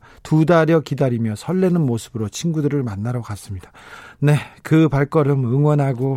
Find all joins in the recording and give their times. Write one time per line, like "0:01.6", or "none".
none